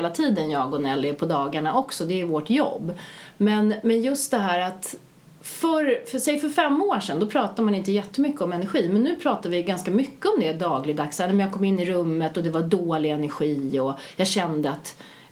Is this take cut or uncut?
uncut